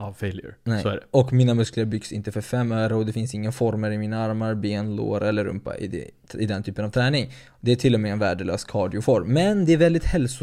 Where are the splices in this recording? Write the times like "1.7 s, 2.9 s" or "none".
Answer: none

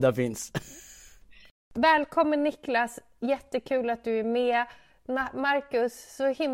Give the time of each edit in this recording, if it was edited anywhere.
none

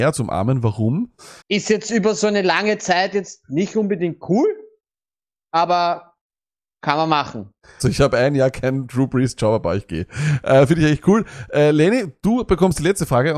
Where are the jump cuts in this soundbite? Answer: 1.4 s, 7.8 s

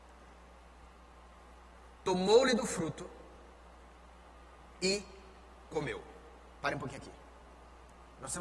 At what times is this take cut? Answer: none

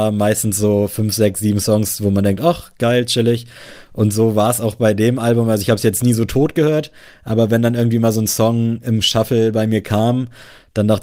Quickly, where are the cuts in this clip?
none

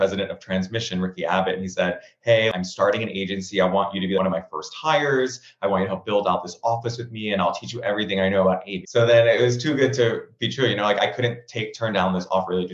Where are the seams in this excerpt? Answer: 8.8 s, 11.0 s

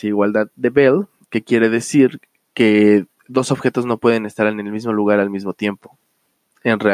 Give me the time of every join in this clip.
1.2 s

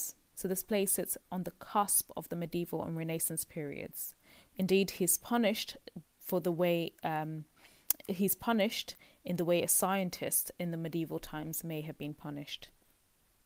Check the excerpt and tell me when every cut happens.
4.5 s, 6.0 s

